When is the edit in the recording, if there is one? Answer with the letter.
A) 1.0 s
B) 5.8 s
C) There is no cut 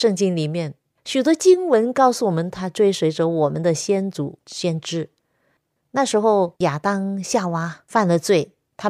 B